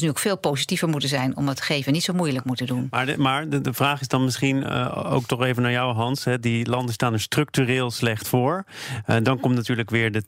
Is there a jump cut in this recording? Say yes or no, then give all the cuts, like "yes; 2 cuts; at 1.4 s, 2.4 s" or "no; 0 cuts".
no; 0 cuts